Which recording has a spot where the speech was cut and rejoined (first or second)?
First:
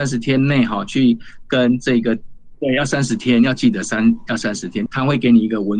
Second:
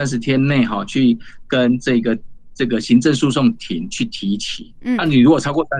first